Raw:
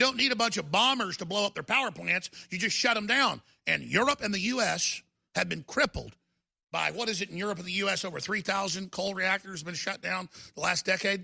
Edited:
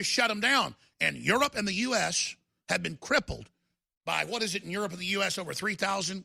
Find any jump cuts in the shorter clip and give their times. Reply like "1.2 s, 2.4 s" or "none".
none